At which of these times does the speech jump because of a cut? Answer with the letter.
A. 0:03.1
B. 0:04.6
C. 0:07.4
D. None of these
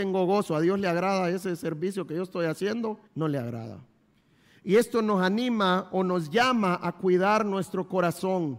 A